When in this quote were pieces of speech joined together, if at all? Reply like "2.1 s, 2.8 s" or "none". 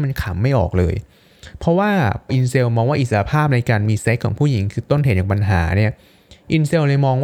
2.3 s